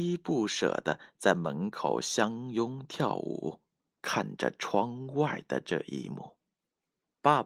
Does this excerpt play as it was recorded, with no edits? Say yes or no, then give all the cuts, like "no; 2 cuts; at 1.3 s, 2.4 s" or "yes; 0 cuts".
no; 1 cut; at 3.9 s